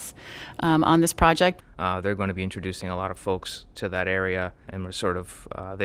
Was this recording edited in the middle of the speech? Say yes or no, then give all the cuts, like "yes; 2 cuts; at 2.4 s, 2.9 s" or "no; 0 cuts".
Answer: yes; 2 cuts; at 1.6 s, 4.7 s